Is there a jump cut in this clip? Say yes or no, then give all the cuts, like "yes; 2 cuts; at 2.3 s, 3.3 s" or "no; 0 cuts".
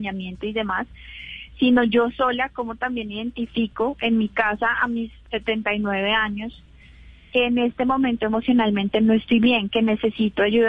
yes; 1 cut; at 5.2 s